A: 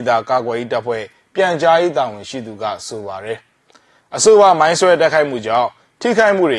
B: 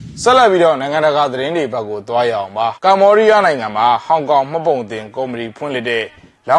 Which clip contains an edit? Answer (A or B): B